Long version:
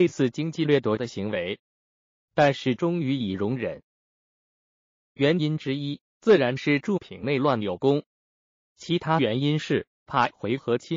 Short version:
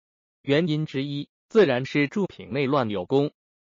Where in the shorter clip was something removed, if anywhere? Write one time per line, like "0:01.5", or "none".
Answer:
none